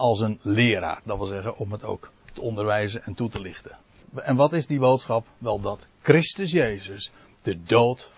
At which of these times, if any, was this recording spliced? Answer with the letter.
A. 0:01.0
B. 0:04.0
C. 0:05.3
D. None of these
B